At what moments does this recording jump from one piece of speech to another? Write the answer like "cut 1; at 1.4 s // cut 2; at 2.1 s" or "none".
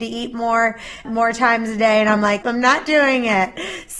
cut 1; at 1.0 s // cut 2; at 2.4 s